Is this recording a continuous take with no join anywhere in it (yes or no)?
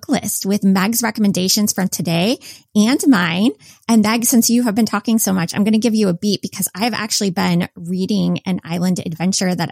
yes